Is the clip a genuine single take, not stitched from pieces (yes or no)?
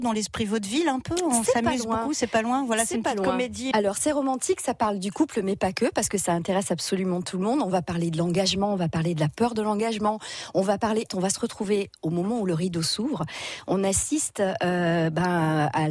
no